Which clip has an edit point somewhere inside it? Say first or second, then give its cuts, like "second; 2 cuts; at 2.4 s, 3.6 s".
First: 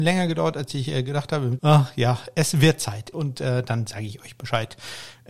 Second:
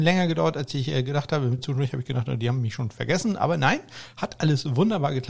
first; 2 cuts; at 1.6 s, 3.1 s